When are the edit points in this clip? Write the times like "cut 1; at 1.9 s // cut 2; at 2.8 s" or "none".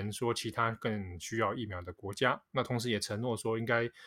none